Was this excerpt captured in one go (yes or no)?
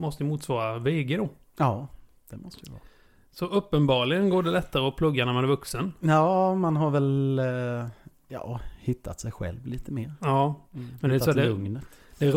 yes